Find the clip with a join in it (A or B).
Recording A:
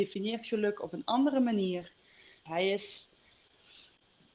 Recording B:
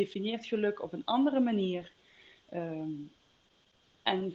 A